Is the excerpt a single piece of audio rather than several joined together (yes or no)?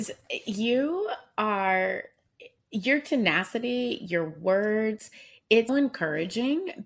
no